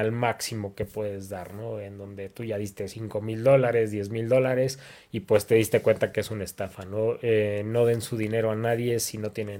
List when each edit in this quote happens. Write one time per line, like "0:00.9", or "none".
none